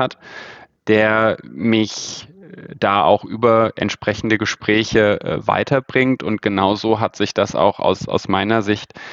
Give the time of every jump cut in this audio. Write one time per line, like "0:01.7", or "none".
none